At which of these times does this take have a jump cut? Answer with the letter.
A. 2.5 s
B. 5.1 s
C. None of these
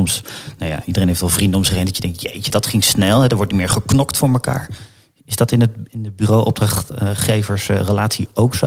A